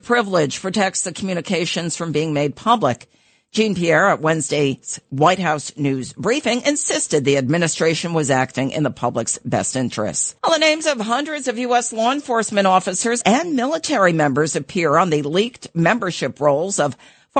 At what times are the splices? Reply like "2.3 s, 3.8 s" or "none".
10.4 s, 13.2 s